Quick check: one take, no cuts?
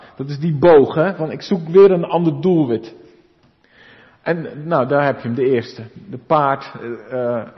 yes; 0 cuts

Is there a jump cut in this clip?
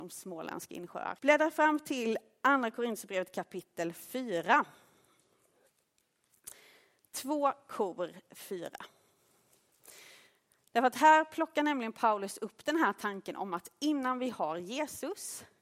yes; 1 cut; at 1.2 s

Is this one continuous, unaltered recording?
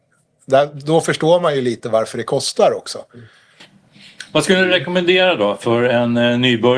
yes; 0 cuts

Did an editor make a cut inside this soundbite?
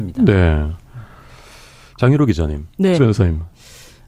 yes; 1 cut; at 3.0 s

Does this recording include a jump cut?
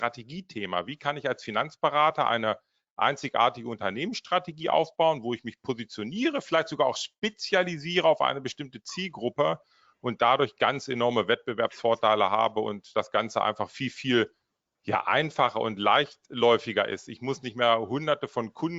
no; 0 cuts

